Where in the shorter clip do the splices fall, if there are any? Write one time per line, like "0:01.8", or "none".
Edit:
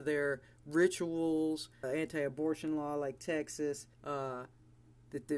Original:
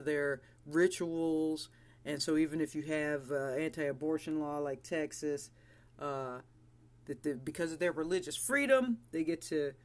0:01.8
0:03.9